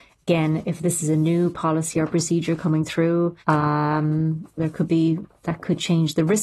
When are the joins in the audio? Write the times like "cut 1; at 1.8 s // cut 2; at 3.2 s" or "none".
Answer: cut 1; at 3.4 s // cut 2; at 4.6 s